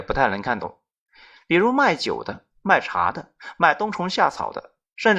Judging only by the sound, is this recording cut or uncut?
uncut